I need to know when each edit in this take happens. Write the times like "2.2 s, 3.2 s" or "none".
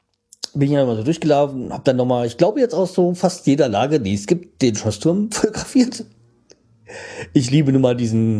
none